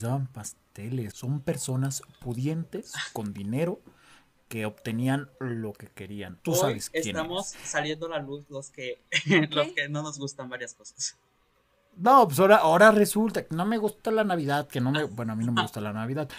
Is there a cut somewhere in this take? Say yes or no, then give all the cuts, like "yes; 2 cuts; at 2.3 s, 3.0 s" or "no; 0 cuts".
yes; 2 cuts; at 1.1 s, 6.4 s